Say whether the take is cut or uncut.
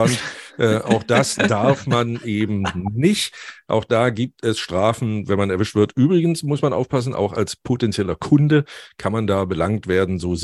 uncut